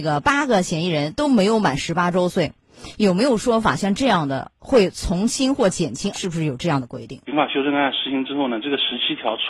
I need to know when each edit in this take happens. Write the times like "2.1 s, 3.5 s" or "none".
6.1 s, 7.3 s